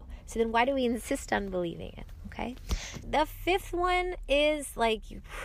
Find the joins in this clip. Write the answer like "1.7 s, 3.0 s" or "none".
3.0 s